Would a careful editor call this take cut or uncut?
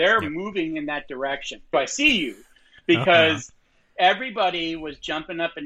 cut